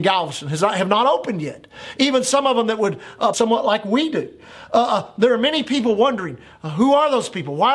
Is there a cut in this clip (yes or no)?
yes